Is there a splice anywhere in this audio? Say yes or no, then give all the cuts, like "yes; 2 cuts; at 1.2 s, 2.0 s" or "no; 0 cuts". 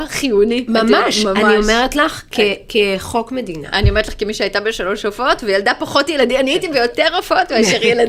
no; 0 cuts